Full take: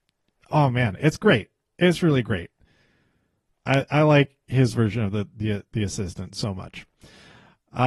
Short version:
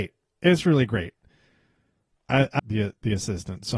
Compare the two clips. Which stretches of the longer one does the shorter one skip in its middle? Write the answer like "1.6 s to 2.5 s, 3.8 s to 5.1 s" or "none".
4.0 s to 5.3 s

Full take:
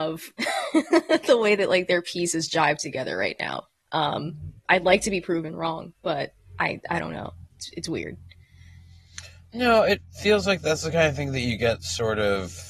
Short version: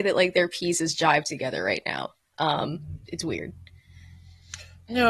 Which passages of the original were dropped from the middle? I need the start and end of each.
4.6 s to 7.7 s

